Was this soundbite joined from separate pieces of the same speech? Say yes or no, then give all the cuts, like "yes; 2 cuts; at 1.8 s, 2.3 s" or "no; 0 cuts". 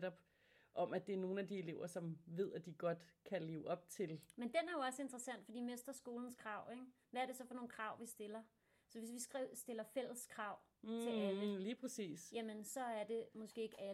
no; 0 cuts